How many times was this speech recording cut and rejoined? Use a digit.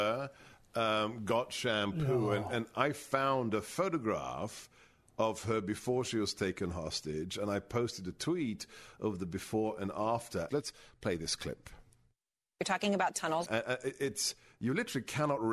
2